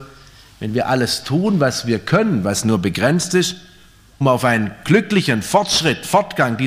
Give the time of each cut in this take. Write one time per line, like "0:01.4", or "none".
0:04.2

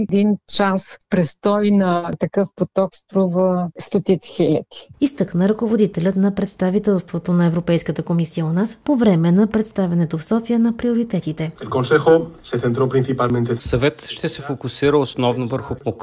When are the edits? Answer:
0:04.9
0:08.8

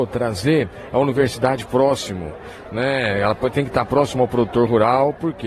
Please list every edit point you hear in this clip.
none

